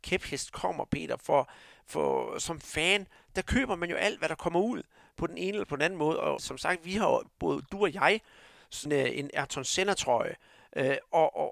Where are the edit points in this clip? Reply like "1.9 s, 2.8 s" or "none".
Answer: 6.4 s, 8.9 s